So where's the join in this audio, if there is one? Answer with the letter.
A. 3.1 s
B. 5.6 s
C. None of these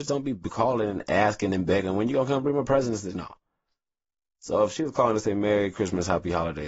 A